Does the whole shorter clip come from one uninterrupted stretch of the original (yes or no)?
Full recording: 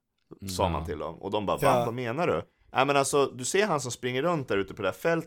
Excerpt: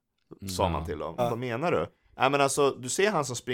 no